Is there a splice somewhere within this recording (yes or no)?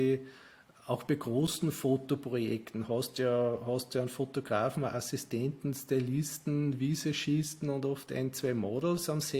no